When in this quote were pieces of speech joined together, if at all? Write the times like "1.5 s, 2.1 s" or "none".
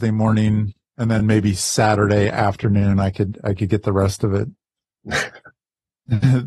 none